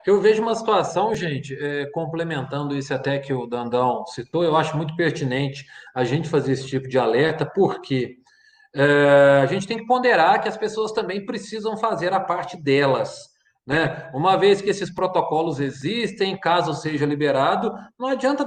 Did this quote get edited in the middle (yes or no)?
no